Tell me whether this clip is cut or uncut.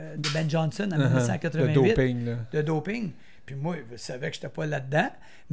uncut